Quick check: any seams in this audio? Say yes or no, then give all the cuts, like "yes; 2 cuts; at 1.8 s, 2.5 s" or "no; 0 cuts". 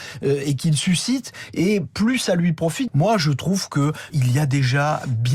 yes; 2 cuts; at 2.9 s, 4.1 s